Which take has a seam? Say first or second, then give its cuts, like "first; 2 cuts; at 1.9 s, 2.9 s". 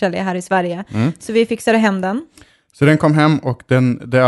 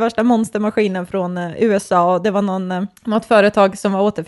second; 1 cut; at 3.0 s